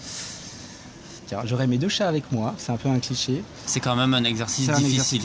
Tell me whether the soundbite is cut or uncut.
cut